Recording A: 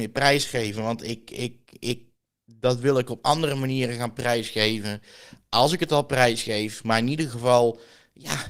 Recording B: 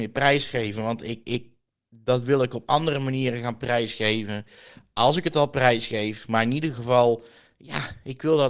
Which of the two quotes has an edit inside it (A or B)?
B